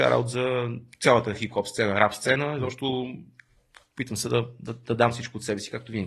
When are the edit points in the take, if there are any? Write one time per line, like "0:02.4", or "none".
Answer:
none